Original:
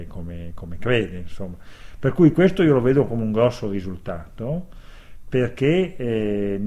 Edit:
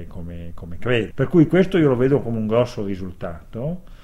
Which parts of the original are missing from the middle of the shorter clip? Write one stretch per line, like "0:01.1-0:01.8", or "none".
0:01.1-0:02.0